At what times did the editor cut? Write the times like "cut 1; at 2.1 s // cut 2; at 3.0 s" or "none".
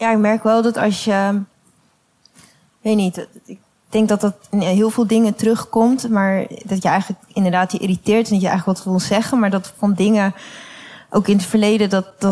none